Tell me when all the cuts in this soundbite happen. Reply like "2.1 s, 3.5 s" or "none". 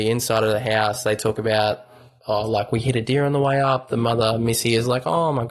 none